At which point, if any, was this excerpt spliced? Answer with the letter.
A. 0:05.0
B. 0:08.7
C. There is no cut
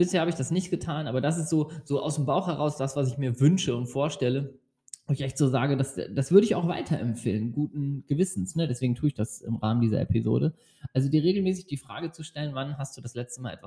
C